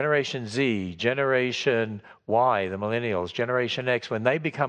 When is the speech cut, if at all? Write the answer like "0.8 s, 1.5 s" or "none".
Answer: none